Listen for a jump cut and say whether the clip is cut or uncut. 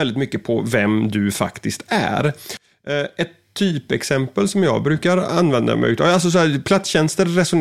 uncut